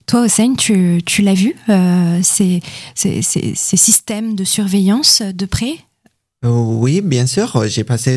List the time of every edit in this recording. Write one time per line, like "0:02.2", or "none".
none